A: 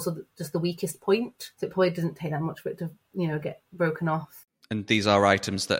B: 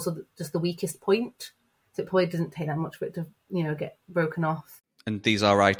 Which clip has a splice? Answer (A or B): A